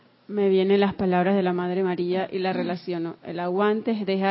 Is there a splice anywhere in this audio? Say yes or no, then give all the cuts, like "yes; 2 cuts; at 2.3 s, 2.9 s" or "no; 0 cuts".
no; 0 cuts